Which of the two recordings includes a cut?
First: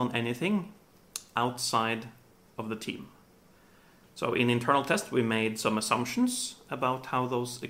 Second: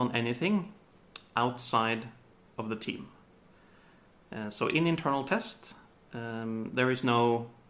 first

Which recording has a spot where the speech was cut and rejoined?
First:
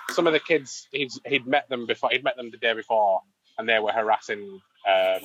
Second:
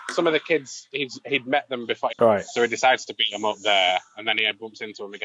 second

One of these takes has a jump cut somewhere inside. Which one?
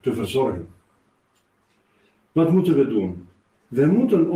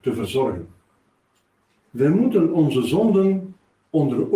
second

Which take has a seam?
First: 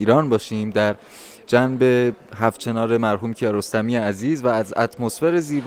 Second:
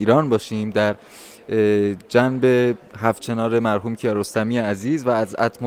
first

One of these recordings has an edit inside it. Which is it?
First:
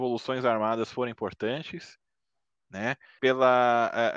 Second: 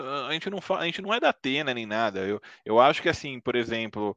first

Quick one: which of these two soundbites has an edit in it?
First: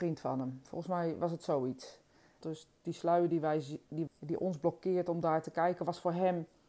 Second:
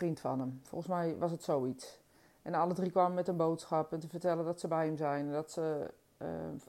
first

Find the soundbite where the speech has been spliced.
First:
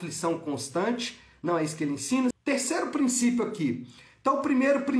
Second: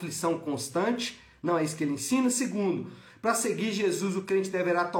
first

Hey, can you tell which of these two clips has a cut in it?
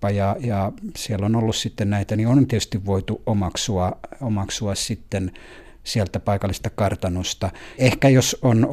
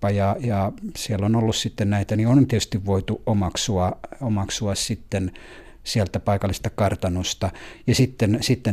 first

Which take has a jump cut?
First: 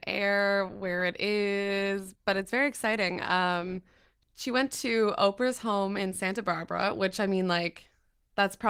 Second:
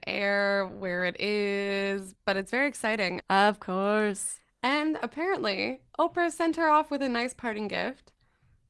second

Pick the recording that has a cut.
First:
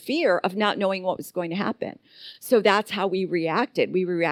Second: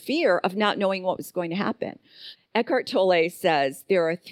second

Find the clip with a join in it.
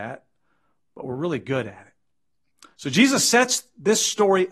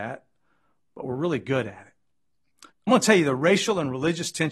second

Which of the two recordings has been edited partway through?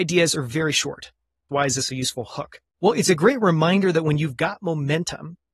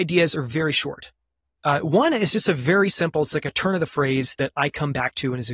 first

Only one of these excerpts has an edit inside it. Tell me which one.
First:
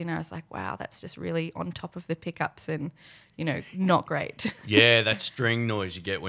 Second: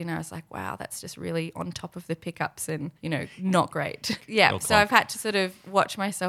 second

